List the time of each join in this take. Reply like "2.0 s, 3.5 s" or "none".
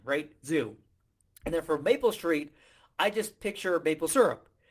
none